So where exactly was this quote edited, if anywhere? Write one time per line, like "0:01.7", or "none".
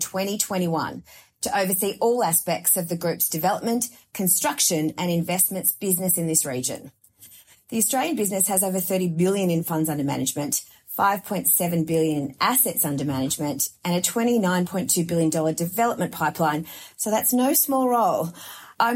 none

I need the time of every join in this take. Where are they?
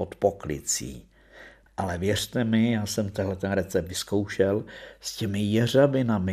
0:01.7

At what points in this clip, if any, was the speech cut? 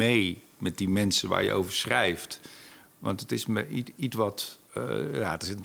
0:04.7

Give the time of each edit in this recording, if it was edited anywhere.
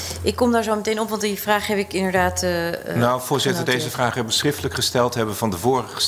none

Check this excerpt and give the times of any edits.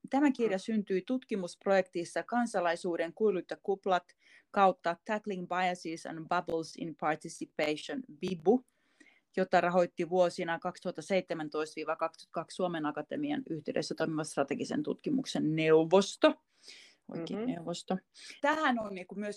0:18.4

